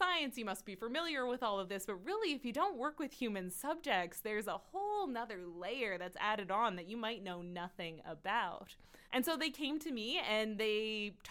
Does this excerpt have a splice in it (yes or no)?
yes